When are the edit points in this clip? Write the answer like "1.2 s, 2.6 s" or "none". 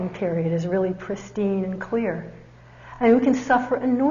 none